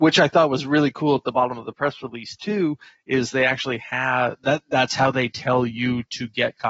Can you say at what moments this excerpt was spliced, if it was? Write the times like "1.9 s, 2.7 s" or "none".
none

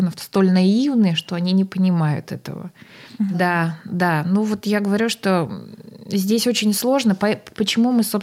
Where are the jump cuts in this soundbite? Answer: 3.3 s

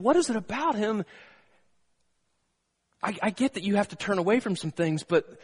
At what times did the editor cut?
none

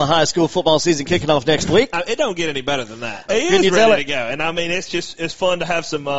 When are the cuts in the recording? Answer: 3.3 s

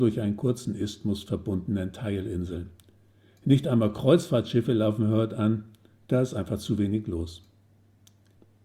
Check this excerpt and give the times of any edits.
none

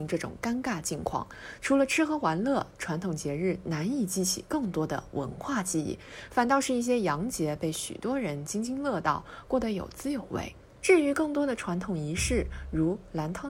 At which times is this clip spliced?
10.8 s

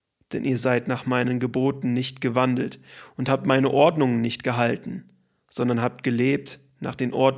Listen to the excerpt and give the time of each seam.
none

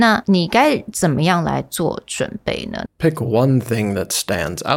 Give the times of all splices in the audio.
2.9 s

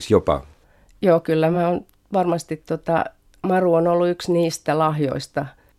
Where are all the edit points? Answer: none

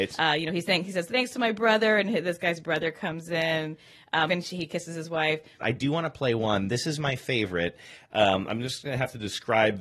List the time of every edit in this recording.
4.3 s, 5.6 s

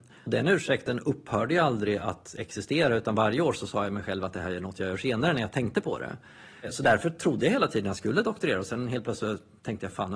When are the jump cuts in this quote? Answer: none

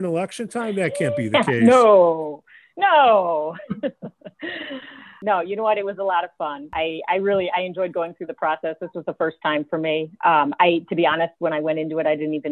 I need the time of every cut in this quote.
none

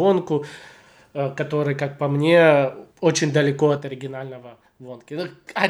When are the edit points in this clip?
2.9 s

